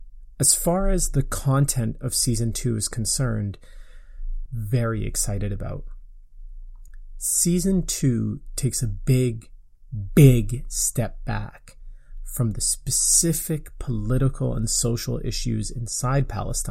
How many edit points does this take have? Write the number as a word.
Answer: one